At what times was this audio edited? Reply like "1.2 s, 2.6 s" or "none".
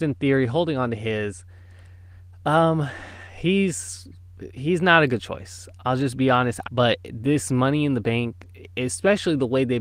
6.6 s